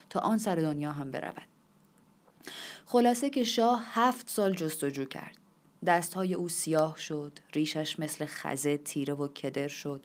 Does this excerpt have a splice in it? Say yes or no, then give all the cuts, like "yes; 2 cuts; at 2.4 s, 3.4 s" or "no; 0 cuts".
no; 0 cuts